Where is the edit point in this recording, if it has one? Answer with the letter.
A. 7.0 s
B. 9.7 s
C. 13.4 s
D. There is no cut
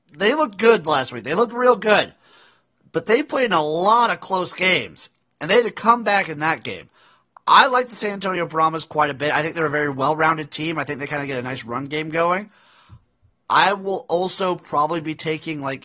C